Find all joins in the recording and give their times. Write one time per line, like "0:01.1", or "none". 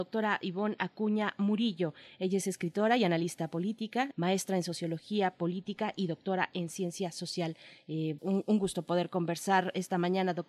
0:04.1
0:08.2